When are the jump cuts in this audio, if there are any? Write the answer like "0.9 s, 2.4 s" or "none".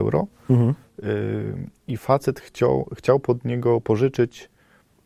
none